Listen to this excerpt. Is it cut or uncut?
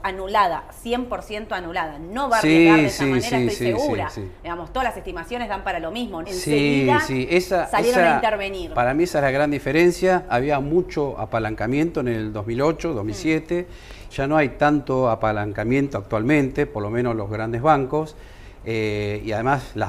cut